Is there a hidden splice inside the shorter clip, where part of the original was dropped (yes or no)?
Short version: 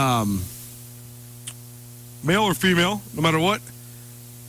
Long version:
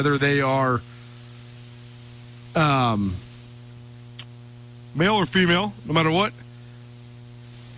no